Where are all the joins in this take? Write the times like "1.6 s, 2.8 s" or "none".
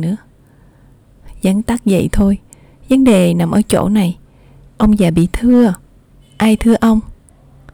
none

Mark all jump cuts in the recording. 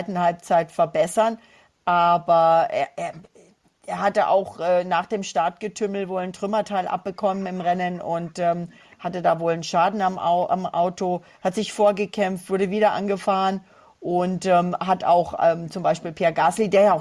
none

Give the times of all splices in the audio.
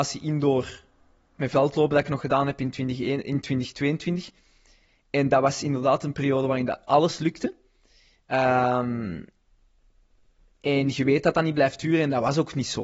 none

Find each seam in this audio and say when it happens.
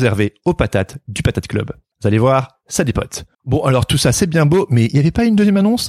1.9 s, 3.3 s

